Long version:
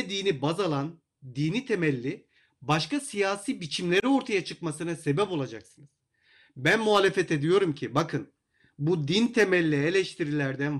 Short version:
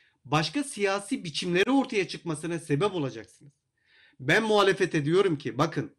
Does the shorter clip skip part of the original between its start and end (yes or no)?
no